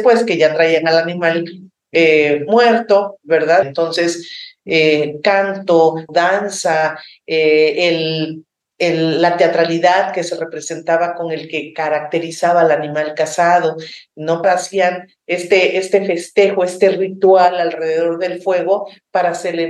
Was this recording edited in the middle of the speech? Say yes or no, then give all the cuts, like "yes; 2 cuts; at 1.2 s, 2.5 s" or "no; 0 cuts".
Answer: yes; 3 cuts; at 3.6 s, 6.1 s, 14.4 s